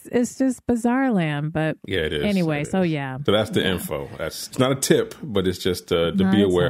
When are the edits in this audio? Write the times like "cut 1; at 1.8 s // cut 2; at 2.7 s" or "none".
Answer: cut 1; at 4.5 s